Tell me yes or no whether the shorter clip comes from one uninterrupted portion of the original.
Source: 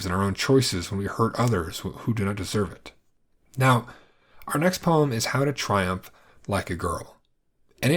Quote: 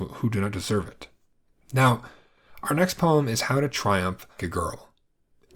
no